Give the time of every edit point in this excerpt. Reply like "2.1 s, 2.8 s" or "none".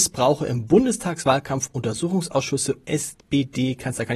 2.8 s